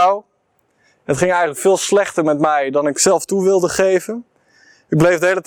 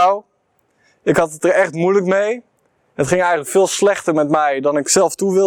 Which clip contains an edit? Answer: first; 1 cut; at 1.0 s

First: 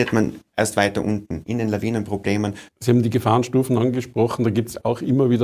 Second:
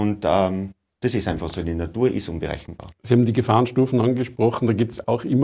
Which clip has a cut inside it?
first; 1 cut; at 2.7 s

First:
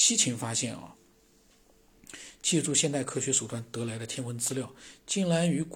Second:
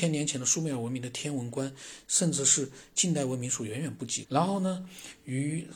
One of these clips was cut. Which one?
second; 1 cut; at 4.2 s

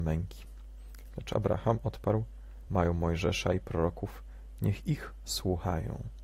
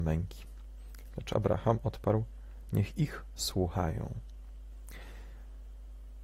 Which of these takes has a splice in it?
second; 1 cut; at 2.7 s

